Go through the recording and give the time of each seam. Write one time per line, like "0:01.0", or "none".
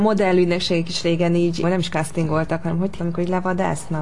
0:01.6
0:03.0